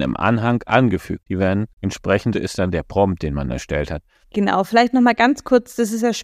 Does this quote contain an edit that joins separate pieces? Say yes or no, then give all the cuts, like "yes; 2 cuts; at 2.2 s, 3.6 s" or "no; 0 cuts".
yes; 2 cuts; at 2.3 s, 4.2 s